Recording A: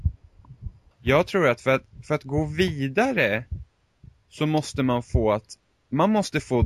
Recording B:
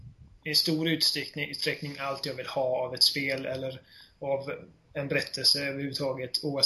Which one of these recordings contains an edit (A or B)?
A